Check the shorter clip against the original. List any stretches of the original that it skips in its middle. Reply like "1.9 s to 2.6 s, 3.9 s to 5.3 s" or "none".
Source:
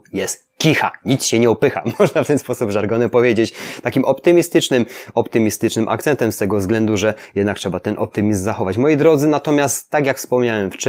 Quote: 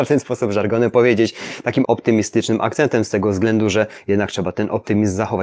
4.0 s to 5.1 s